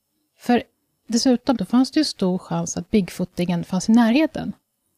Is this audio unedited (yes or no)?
no